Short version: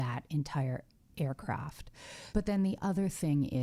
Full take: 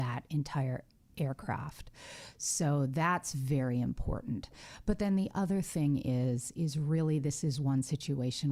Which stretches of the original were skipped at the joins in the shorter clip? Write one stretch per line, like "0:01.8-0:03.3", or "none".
0:02.3-0:04.8